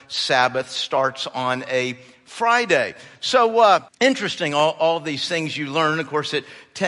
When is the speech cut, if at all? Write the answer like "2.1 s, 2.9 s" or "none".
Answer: 3.9 s